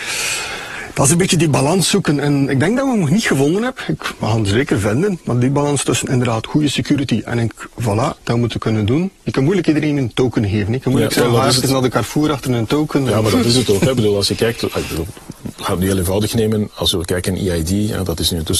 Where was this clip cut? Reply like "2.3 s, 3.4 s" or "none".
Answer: 8.2 s

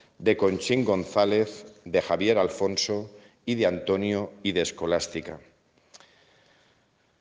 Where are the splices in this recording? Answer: none

